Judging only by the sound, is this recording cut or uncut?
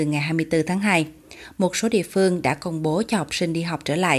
uncut